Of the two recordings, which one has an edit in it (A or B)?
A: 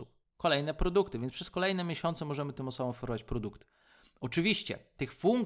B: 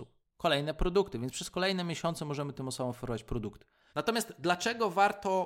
B